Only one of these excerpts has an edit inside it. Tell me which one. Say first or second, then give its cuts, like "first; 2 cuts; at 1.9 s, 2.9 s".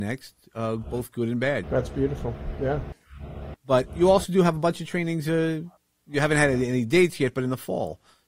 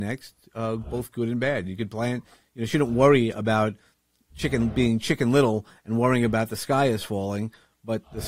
first; 2 cuts; at 1.6 s, 3.5 s